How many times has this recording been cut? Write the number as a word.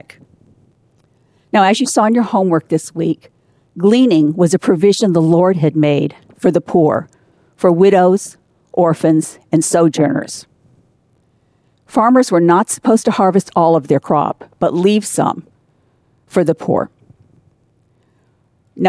zero